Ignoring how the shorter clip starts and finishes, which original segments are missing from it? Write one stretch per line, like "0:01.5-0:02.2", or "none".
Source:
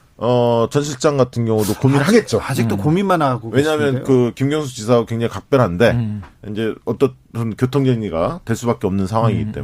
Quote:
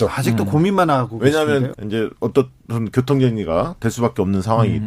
0:04.0-0:06.4

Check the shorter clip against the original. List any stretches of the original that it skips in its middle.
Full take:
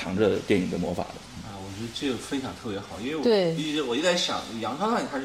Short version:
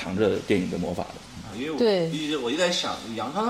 0:01.5-0:03.0

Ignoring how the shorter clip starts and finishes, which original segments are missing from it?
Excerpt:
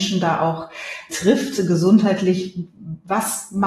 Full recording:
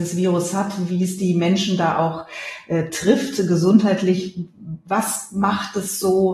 0:02.7-0:02.9

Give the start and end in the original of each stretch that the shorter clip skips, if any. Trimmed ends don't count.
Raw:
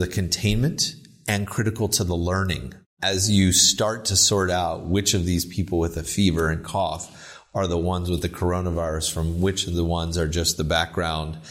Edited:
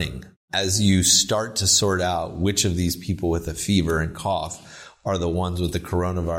none

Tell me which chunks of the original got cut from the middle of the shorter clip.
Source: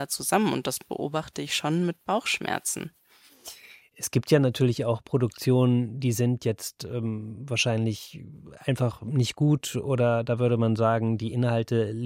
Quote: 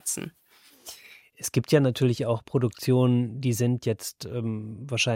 none

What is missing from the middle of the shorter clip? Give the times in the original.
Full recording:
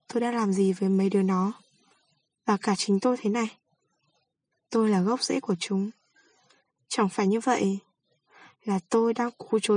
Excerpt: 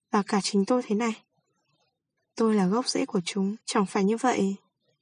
0:06.0-0:06.8

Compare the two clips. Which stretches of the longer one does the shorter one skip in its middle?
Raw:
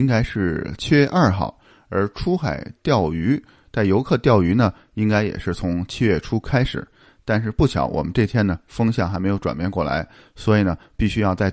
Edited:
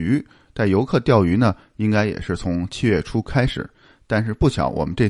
none

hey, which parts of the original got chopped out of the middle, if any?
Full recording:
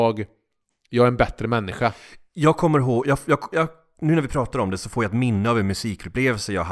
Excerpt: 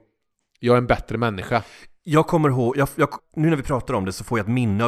0:03.5-0:03.8

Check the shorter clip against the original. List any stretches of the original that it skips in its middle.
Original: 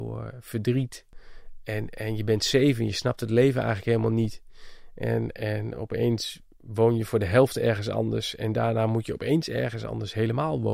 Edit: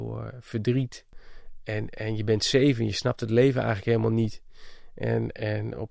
none

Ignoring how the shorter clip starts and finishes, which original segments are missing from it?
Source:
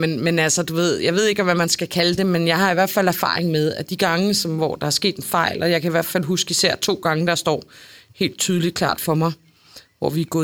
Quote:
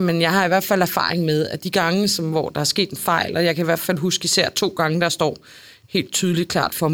none

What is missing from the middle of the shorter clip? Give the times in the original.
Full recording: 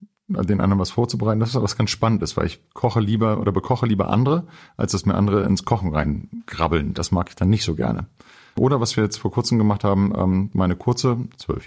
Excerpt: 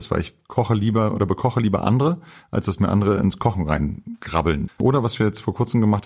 0:06.9-0:08.5

